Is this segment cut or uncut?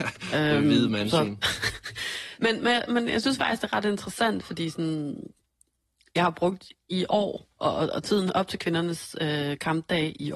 cut